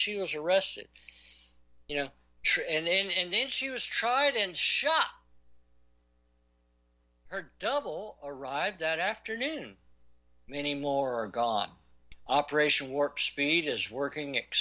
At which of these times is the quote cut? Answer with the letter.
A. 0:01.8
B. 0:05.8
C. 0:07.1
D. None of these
D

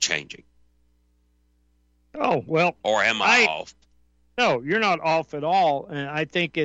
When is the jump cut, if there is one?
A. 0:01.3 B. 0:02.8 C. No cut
C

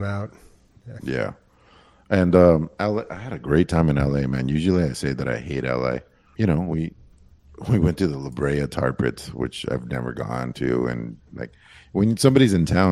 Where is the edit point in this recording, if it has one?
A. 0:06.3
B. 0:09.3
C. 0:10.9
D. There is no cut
A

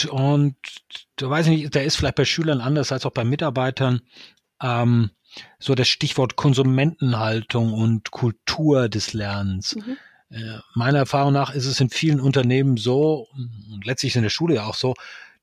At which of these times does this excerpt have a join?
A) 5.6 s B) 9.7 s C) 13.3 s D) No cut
C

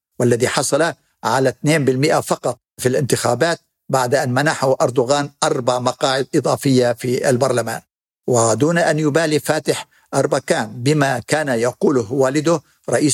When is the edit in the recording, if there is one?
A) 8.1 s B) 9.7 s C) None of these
C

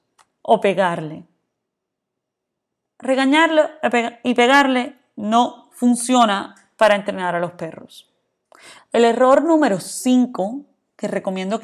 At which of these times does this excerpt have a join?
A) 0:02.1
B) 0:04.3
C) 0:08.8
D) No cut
C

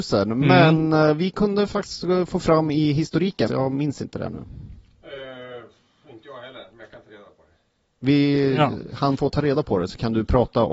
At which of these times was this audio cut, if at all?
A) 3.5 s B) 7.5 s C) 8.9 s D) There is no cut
A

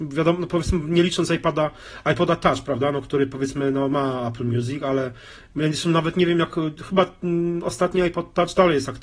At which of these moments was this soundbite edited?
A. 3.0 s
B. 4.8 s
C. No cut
C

